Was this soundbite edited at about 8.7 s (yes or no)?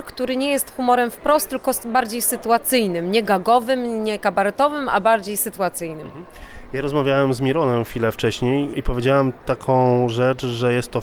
yes